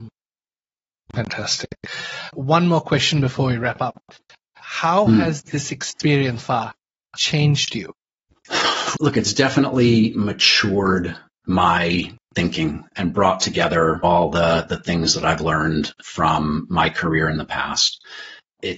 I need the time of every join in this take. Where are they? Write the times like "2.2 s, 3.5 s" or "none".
6.4 s, 8.9 s